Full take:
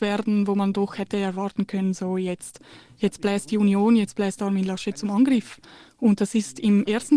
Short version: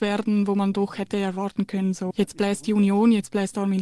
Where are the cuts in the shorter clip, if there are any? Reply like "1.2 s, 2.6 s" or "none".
2.1 s